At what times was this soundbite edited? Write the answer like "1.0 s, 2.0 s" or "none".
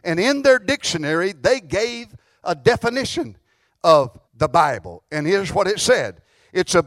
4.3 s